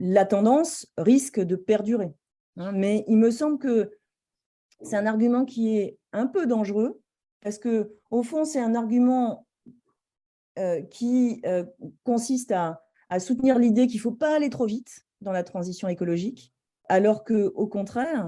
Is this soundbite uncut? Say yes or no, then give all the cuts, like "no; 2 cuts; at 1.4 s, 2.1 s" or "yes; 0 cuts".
yes; 0 cuts